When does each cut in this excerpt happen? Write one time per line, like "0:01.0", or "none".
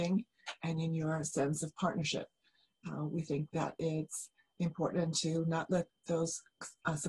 0:05.9

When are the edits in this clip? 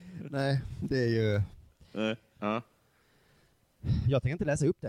0:02.4

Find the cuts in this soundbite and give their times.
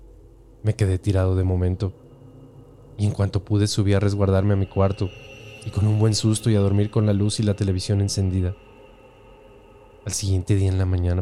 0:05.6

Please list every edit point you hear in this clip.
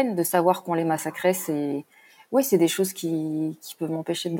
none

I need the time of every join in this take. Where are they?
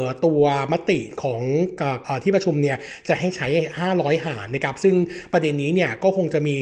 0:02.0

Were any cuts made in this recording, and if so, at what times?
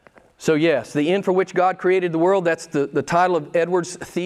none

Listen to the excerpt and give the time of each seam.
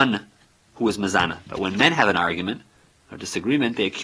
0:01.5

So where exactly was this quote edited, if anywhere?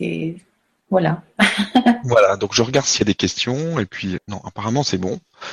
0:04.2

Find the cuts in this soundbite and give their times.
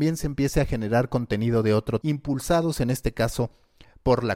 0:02.0

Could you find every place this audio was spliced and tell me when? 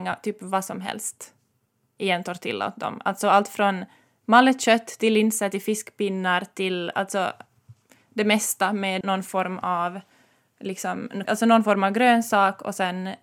0:09.0
0:11.2

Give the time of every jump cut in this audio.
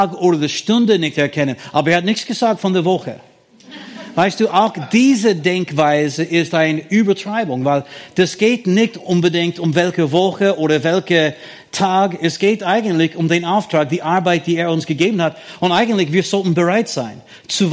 none

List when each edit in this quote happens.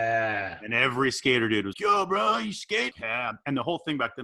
0:01.7
0:02.9

